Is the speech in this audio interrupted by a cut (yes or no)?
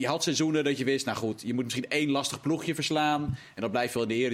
no